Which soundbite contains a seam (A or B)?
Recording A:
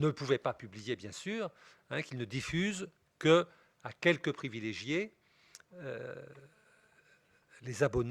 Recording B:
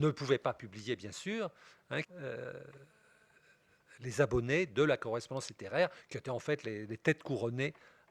B